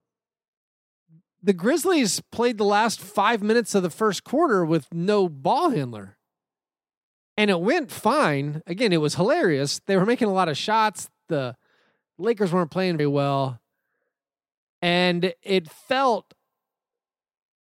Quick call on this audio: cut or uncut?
cut